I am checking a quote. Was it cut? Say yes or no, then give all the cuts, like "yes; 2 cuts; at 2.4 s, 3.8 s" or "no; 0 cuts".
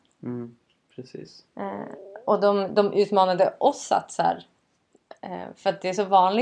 no; 0 cuts